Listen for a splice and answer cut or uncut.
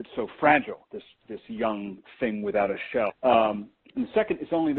cut